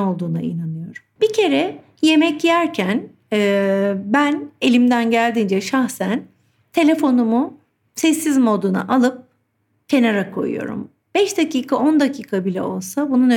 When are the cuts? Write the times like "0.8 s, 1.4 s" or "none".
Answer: 1.2 s